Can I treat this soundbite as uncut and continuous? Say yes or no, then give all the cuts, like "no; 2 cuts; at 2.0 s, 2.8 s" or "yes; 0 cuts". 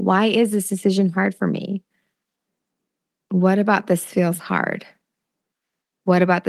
yes; 0 cuts